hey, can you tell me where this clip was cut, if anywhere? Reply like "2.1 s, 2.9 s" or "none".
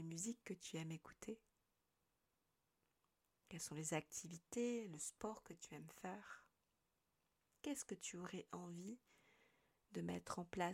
none